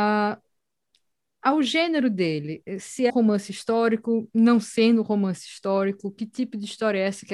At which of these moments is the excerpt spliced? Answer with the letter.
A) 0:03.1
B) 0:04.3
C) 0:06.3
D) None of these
A